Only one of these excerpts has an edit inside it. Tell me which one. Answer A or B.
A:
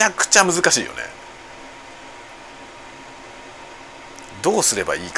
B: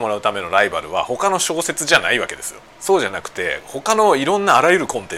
B